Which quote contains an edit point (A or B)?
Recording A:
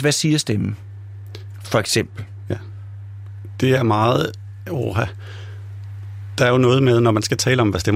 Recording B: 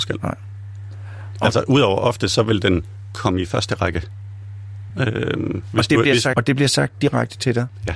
B